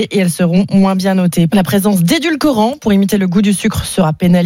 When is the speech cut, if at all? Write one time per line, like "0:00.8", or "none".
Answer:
0:01.5